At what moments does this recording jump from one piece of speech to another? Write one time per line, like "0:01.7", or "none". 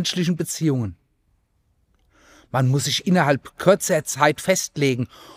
none